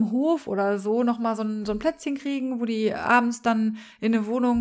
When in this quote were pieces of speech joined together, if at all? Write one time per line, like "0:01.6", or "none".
none